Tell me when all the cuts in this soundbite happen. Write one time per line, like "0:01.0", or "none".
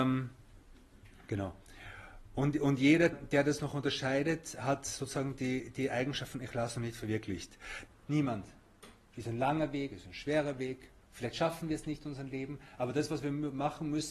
0:03.1
0:07.9
0:09.1